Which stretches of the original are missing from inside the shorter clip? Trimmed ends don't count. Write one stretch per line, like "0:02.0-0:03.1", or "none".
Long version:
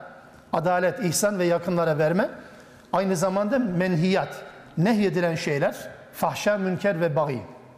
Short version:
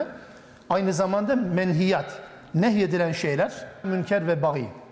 0:06.1-0:06.6

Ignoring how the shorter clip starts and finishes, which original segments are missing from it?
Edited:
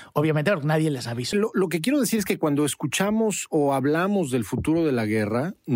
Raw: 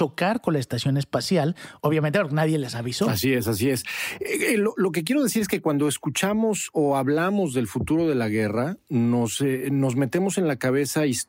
0:03.0-0:04.6

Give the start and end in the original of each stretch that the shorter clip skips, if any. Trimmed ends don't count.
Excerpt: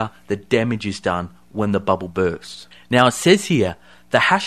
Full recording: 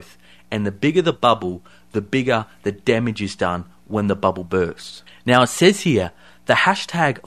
none

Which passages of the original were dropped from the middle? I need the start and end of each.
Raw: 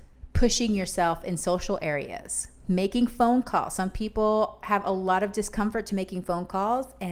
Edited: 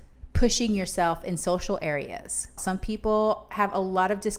0:02.6-0:03.7

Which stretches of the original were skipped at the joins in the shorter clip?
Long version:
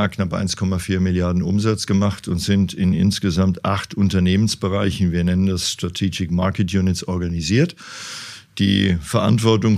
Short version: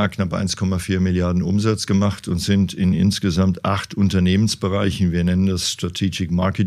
none

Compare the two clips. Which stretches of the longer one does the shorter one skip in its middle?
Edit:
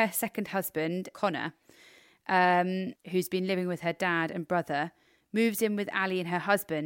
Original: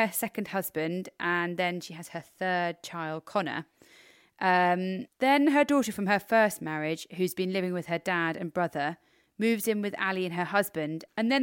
0:01.1-0:03.3
0:05.1-0:07.1

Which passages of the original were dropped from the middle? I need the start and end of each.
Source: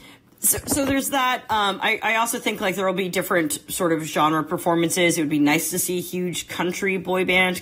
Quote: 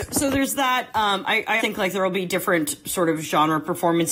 0:02.1-0:02.4

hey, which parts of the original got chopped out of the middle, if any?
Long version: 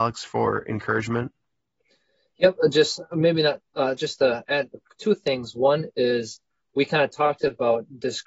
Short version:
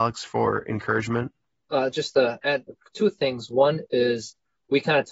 0:01.6-0:03.7

